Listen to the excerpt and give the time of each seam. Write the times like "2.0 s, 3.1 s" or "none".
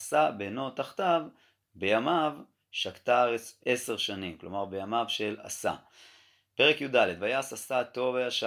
3.6 s